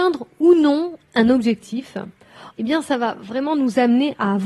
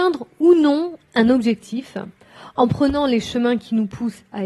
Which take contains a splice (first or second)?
first